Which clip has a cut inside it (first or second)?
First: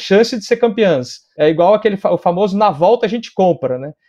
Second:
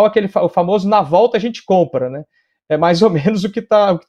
first